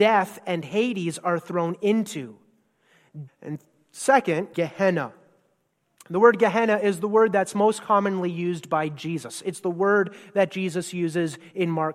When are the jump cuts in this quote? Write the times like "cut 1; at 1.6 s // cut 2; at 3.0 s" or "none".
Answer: cut 1; at 3.3 s // cut 2; at 4.5 s